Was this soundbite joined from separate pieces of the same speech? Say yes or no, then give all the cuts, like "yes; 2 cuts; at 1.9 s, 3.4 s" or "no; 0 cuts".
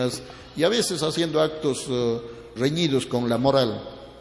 yes; 1 cut; at 2.6 s